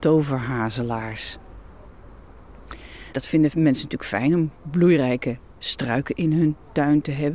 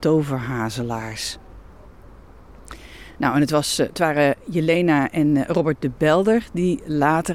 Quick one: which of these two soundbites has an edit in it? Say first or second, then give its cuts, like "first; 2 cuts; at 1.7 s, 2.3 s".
first; 1 cut; at 3.1 s